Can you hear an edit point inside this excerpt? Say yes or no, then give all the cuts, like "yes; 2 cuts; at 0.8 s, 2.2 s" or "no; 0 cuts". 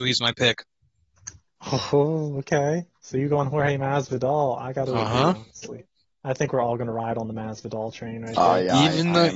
no; 0 cuts